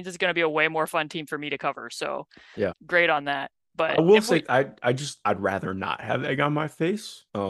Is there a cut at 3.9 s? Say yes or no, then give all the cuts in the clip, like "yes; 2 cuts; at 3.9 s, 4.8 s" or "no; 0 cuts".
no; 2 cuts; at 2.7 s, 5.2 s